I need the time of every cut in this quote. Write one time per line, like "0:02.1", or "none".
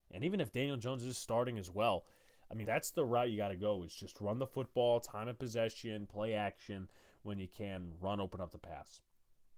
0:02.6